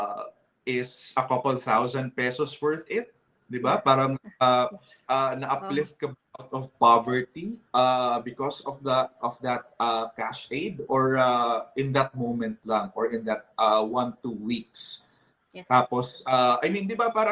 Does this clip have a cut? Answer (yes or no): yes